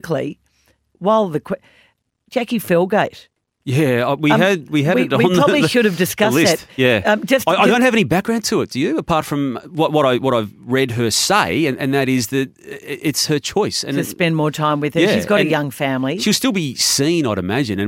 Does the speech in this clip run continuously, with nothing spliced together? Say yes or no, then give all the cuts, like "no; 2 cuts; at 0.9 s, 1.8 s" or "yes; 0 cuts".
yes; 0 cuts